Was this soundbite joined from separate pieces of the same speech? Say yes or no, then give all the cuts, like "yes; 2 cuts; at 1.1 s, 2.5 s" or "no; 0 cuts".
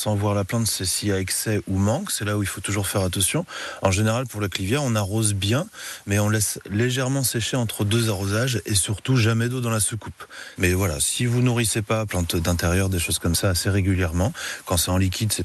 yes; 2 cuts; at 10.6 s, 12.1 s